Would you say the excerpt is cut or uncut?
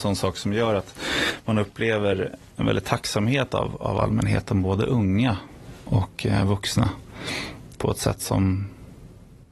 cut